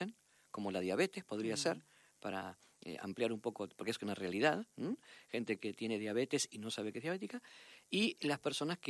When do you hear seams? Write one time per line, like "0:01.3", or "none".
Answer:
none

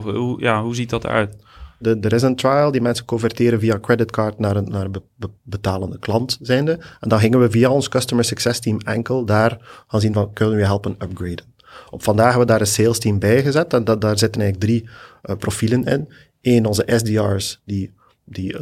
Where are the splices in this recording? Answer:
0:01.8
0:05.4

